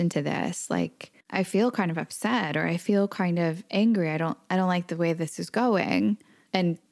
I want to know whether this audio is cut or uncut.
cut